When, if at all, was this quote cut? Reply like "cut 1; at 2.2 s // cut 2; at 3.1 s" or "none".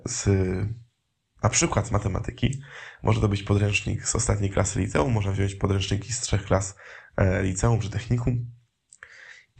none